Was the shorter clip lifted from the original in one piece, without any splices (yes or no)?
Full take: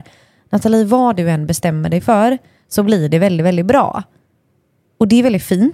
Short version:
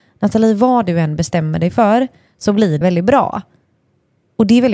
no